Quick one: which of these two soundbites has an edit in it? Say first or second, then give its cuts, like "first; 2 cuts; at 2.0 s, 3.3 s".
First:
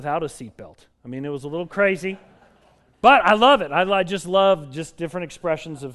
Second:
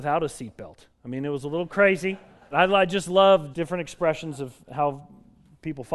second; 2 cuts; at 2.5 s, 3.5 s